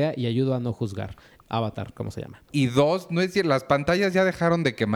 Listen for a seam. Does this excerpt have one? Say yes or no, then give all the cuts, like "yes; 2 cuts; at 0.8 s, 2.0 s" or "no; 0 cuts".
yes; 2 cuts; at 1.4 s, 2.5 s